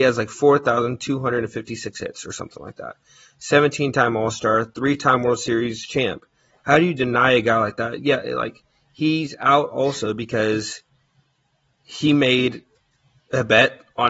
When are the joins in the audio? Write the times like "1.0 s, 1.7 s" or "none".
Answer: none